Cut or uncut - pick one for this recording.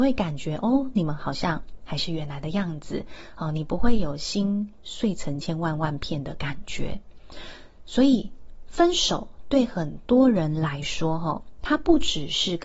cut